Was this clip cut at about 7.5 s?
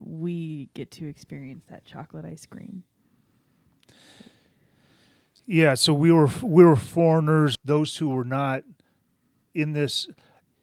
yes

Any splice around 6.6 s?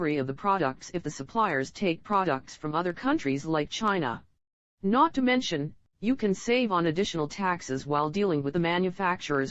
no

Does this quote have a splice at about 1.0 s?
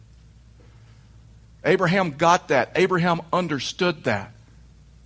no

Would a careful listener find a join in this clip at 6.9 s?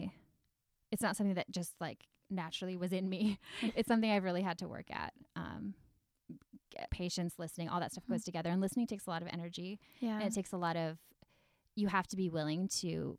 yes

